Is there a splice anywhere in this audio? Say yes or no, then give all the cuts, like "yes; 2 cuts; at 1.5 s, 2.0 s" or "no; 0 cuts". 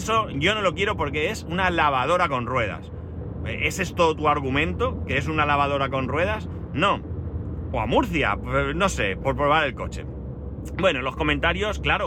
yes; 1 cut; at 7.7 s